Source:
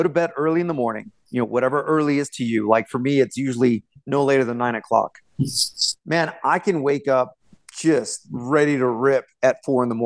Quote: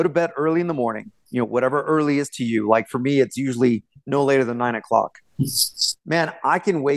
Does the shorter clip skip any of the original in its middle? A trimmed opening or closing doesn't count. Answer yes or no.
no